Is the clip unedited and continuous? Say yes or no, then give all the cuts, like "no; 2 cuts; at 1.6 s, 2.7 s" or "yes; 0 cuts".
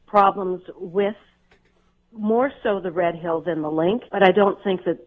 no; 1 cut; at 4.1 s